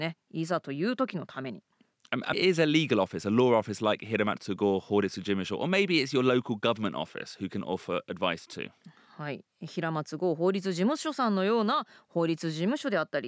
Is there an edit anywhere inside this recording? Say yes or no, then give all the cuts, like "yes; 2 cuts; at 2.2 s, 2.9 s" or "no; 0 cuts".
yes; 1 cut; at 2.3 s